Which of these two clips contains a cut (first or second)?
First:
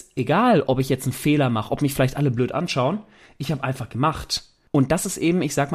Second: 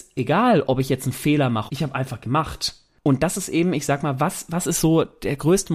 second